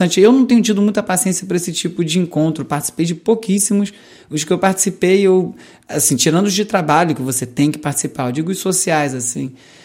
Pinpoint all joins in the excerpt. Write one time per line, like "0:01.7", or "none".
none